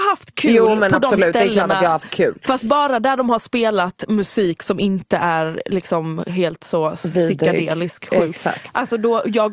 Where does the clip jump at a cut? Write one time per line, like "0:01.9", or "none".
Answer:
none